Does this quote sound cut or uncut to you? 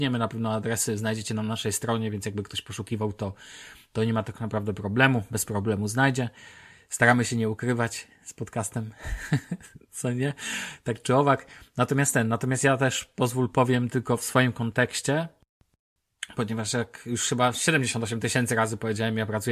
uncut